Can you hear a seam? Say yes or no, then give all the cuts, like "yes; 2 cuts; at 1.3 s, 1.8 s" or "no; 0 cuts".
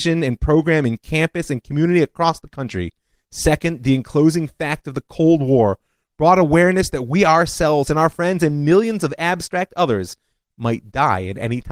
yes; 1 cut; at 3.2 s